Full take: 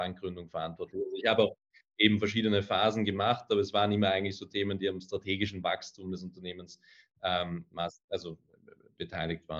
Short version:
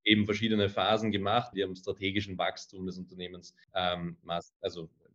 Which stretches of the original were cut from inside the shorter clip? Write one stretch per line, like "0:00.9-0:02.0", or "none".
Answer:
0:03.5-0:04.8
0:06.9-0:07.1